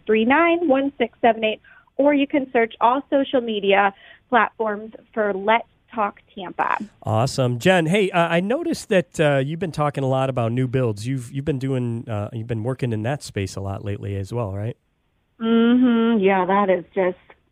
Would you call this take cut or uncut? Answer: uncut